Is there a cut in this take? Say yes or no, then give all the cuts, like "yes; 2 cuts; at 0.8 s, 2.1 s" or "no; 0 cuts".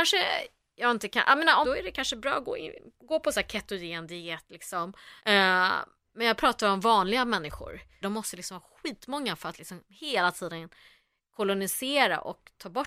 yes; 3 cuts; at 1.6 s, 5.2 s, 8.0 s